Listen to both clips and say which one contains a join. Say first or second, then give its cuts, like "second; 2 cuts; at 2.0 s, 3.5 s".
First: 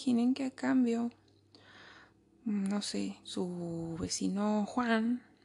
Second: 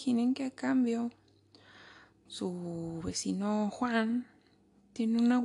second; 1 cut; at 2.3 s